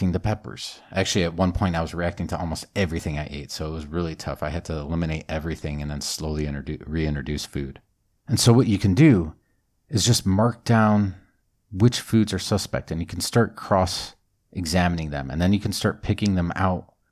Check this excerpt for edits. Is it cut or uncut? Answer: cut